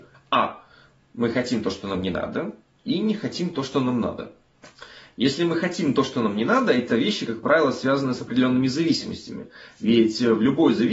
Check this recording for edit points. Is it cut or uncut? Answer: uncut